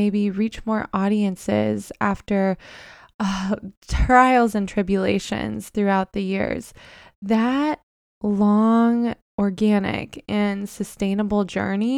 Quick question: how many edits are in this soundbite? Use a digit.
0